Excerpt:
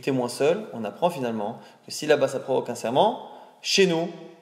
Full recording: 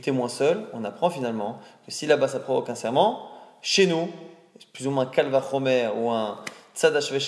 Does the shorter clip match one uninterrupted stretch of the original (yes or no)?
yes